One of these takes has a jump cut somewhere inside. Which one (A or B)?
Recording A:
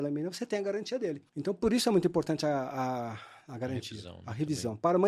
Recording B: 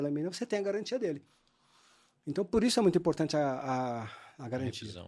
A